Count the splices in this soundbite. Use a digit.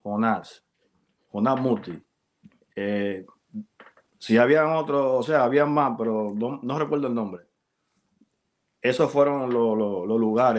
0